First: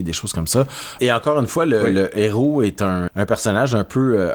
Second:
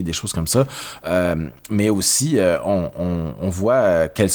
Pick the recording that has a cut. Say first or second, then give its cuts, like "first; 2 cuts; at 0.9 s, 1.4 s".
first; 2 cuts; at 1.0 s, 3.1 s